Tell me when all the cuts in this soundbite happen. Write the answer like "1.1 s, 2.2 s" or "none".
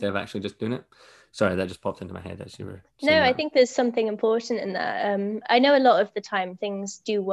none